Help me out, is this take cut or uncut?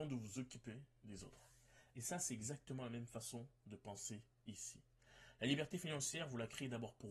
uncut